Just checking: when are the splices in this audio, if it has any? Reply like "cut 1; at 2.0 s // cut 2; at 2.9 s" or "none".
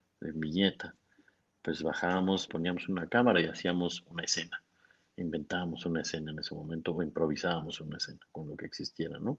cut 1; at 2.5 s